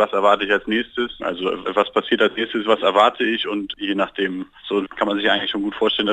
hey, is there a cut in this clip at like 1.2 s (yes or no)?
yes